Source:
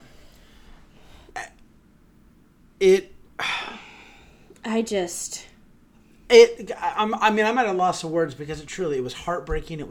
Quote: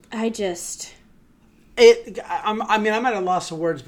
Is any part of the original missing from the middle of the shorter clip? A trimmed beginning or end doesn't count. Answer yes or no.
no